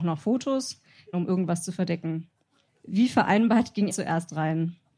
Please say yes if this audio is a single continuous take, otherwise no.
no